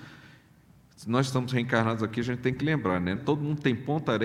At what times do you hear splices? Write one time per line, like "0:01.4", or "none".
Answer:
0:03.2